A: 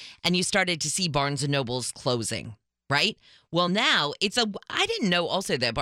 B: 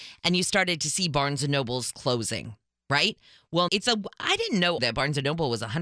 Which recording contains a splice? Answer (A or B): B